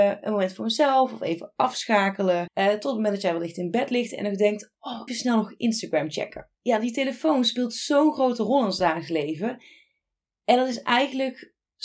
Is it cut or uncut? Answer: cut